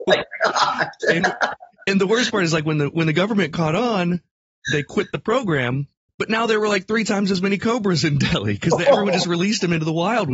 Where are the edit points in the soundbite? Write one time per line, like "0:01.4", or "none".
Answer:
none